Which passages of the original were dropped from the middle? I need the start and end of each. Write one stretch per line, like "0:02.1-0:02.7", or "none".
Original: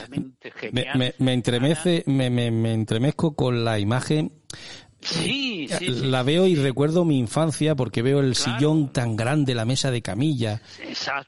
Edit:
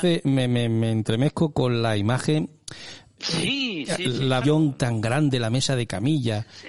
0:06.2-0:08.6